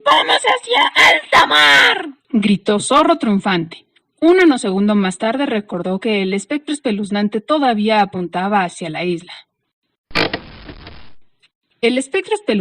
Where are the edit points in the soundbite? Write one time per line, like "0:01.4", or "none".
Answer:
0:02.2

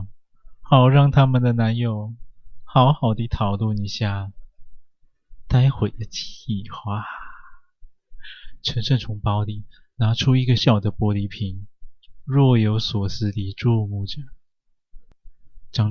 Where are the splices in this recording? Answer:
0:10.6

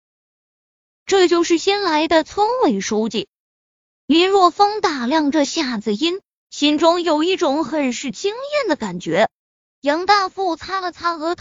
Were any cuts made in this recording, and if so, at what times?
0:09.6

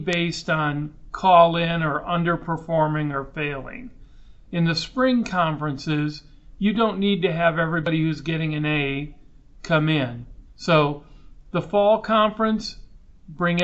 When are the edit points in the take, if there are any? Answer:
0:10.5

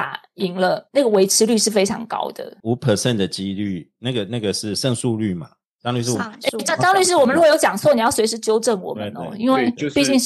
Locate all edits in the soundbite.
0:02.6

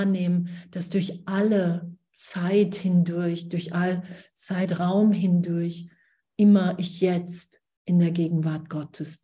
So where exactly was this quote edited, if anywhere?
none

